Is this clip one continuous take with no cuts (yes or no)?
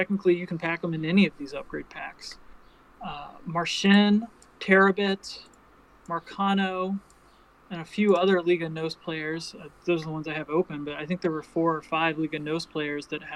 yes